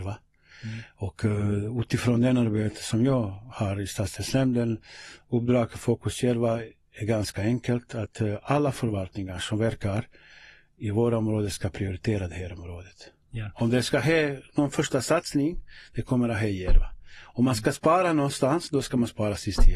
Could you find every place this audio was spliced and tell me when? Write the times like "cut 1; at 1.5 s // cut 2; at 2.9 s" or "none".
none